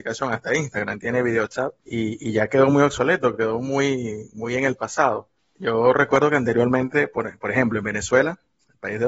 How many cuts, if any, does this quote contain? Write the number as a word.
zero